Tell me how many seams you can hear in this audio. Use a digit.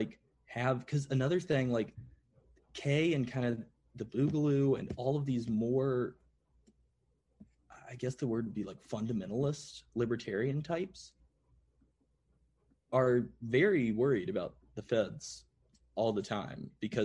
0